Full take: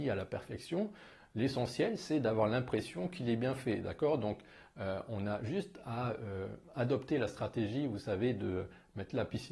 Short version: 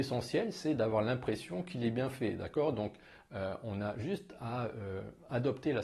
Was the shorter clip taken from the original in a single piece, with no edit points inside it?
yes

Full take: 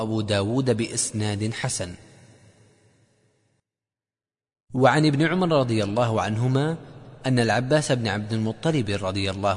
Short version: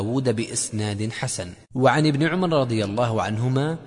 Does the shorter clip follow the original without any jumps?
no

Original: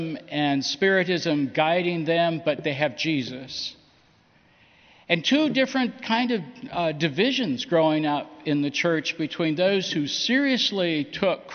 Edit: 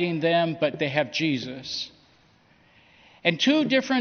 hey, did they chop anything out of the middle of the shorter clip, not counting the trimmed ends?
no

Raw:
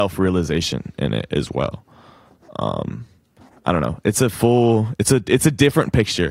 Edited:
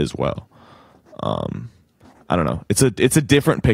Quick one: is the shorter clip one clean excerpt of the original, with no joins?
no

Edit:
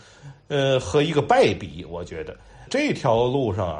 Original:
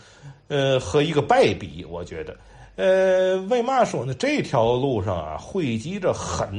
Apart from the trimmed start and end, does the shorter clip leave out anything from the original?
yes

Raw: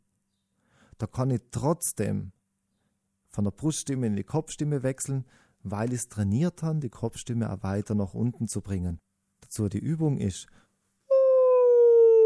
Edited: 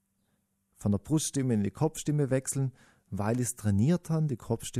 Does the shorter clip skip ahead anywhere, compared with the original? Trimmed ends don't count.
no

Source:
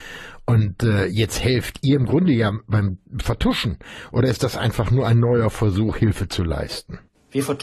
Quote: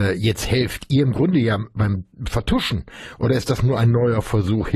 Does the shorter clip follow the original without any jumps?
no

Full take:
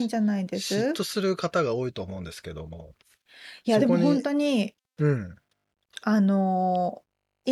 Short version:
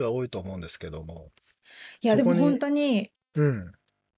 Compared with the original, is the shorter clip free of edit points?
yes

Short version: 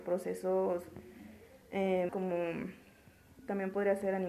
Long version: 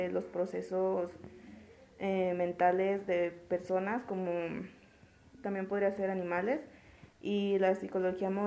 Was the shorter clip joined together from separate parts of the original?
yes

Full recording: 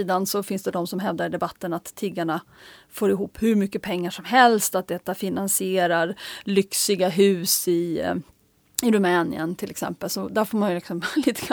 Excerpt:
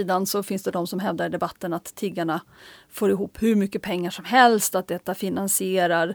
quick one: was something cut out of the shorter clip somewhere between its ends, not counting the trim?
no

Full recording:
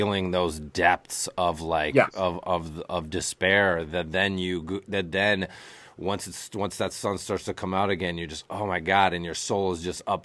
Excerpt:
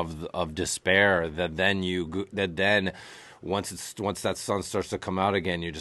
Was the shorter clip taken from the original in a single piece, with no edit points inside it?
yes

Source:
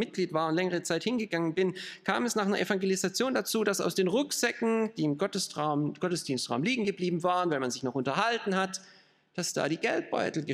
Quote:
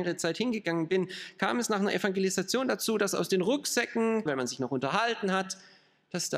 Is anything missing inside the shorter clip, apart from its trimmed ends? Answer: yes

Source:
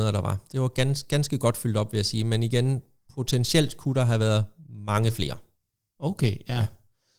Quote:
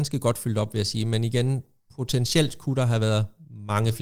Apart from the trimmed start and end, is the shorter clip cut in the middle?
no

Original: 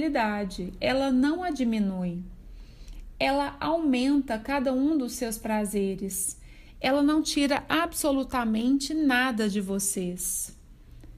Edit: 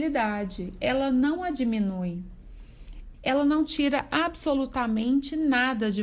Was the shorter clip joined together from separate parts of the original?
yes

